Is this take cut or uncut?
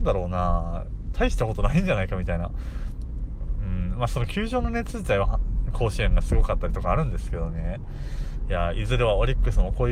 cut